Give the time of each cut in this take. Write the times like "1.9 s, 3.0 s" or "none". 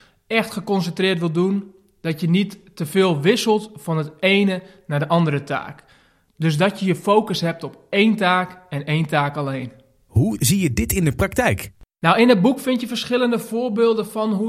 none